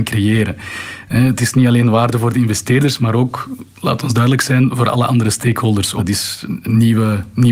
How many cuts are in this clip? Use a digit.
1